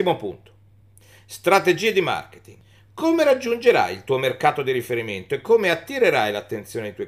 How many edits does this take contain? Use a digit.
0